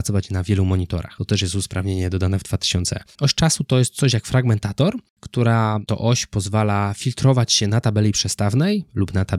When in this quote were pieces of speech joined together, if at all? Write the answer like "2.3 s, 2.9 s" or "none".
3.1 s, 5.1 s